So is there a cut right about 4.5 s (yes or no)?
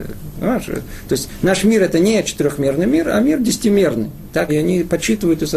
yes